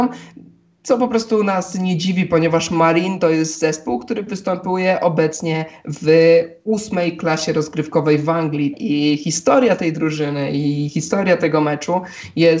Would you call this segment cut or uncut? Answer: cut